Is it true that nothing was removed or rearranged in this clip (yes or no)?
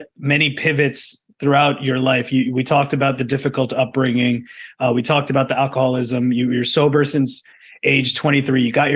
yes